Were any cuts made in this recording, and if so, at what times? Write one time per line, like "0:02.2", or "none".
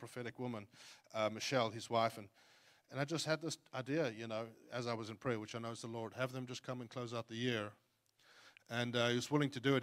none